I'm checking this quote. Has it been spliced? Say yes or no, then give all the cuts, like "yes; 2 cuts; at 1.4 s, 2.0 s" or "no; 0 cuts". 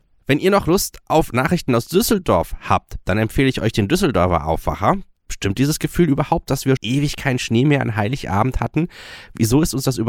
yes; 2 cuts; at 5.2 s, 6.8 s